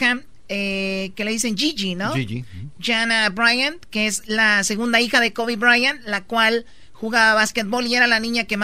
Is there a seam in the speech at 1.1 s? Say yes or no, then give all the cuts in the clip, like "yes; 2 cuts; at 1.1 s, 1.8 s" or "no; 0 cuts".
no; 0 cuts